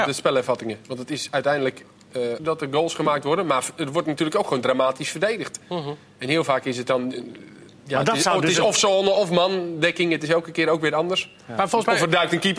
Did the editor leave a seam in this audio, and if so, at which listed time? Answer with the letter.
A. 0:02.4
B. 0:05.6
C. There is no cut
A